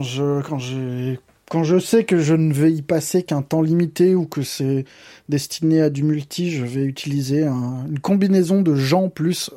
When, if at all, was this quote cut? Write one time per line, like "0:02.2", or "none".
none